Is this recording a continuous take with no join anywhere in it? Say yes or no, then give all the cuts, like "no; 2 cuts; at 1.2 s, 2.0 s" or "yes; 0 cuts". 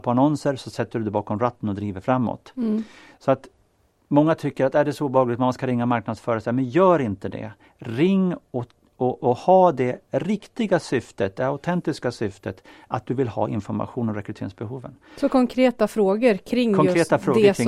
yes; 0 cuts